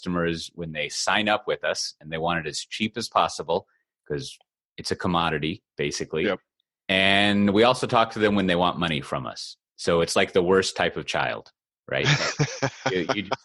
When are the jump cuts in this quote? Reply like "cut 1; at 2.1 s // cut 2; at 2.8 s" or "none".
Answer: none